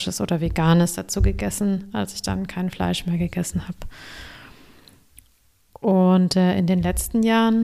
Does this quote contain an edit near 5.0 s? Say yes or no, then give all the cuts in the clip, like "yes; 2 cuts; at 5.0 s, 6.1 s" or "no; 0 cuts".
no; 0 cuts